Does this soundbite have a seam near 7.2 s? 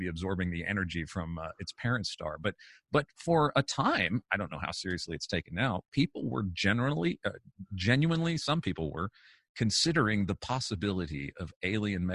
no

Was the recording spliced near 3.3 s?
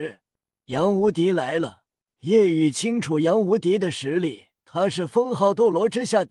no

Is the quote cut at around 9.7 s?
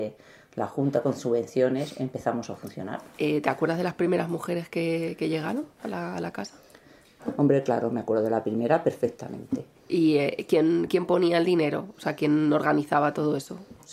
yes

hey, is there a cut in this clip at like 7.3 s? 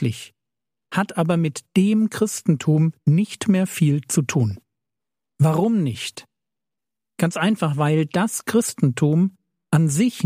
no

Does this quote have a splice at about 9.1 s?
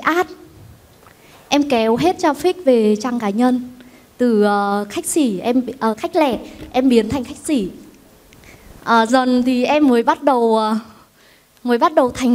yes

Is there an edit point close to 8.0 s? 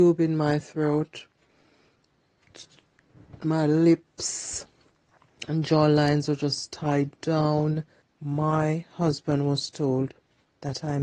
yes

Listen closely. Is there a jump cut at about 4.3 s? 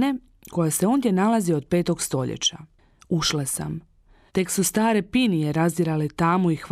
yes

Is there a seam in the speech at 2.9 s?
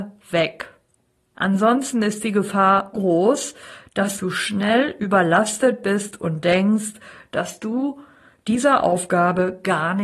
yes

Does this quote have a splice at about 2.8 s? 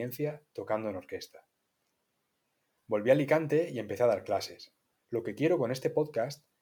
yes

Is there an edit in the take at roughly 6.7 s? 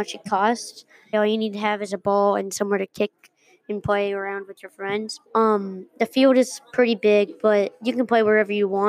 no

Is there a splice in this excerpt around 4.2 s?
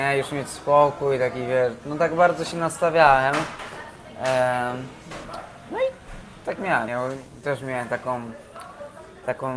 no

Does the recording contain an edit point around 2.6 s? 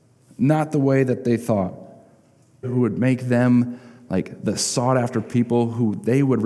yes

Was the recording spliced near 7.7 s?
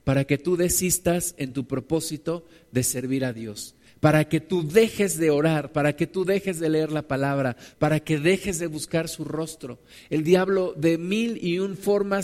yes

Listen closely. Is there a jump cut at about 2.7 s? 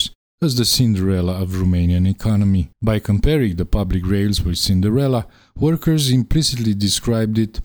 yes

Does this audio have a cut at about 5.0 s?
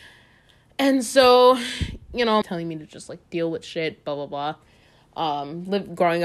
no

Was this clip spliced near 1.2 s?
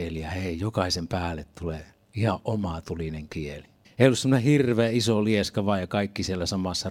no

